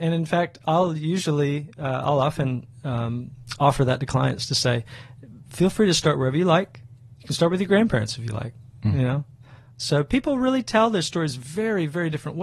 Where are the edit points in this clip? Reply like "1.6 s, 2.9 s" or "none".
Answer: none